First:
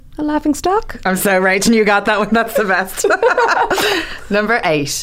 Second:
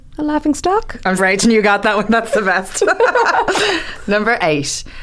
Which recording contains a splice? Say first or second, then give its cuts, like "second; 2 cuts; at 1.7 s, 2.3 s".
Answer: second; 1 cut; at 1.2 s